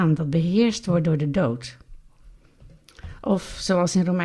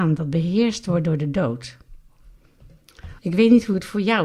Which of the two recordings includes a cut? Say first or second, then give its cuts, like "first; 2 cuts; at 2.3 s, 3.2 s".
second; 1 cut; at 3.2 s